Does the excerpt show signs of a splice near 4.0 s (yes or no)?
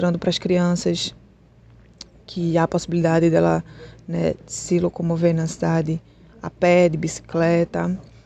no